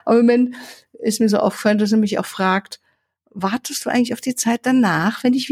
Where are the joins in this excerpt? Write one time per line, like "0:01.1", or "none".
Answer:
none